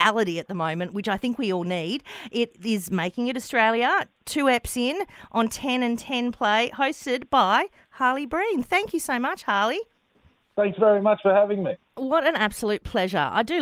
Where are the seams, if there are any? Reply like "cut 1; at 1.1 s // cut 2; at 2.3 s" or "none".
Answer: none